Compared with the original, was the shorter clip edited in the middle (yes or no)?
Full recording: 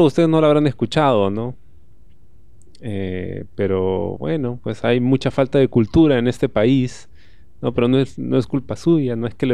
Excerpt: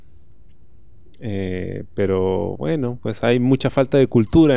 no